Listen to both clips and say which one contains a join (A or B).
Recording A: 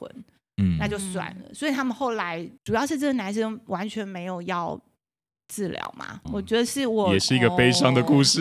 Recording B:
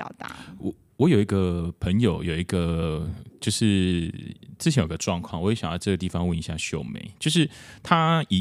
A